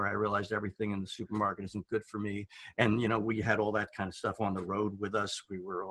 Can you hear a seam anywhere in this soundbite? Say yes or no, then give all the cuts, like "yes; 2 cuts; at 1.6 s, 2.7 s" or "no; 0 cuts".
yes; 1 cut; at 2.7 s